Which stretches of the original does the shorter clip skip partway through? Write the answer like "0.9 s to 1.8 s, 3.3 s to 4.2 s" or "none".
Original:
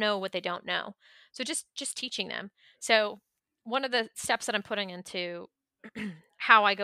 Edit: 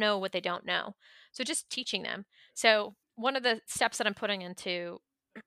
1.7 s to 1.9 s, 3.3 s to 3.5 s